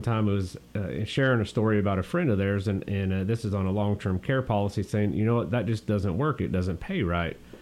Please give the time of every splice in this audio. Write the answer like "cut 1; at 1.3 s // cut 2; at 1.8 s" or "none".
none